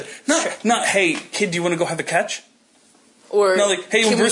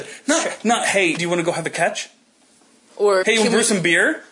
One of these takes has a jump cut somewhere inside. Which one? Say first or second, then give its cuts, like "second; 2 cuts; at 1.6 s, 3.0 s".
second; 2 cuts; at 1.2 s, 3.2 s